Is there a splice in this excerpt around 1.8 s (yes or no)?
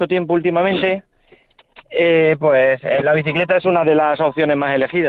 no